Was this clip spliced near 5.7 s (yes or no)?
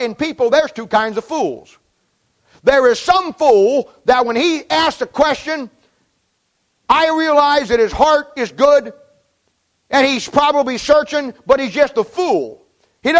no